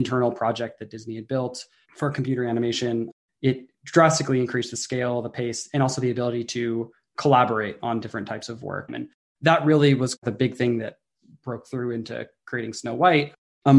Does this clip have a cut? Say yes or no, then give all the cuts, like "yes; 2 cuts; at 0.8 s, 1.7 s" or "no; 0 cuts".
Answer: yes; 1 cut; at 8.9 s